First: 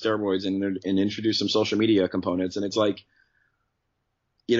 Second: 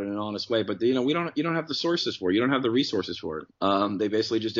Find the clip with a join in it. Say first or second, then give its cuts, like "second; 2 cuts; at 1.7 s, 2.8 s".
second; 1 cut; at 3.5 s